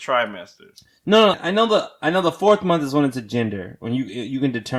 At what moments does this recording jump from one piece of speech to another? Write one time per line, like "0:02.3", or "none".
0:01.3